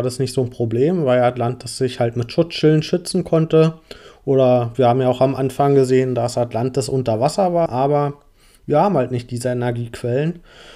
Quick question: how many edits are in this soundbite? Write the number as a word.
one